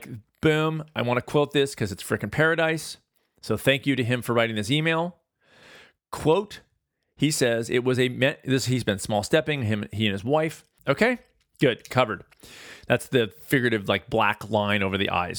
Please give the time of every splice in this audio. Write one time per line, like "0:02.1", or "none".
0:10.8